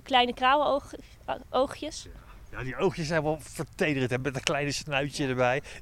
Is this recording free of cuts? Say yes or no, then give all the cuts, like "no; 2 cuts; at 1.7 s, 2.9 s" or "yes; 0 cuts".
yes; 0 cuts